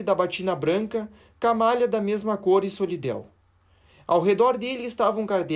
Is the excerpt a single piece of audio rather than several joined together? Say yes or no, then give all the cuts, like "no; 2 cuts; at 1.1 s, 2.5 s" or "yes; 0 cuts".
yes; 0 cuts